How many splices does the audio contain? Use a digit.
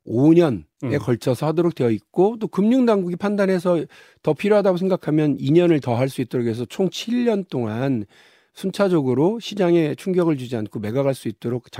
0